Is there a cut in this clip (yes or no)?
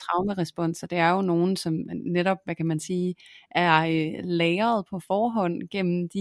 no